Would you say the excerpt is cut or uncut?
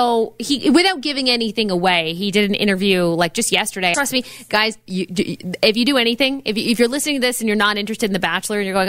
cut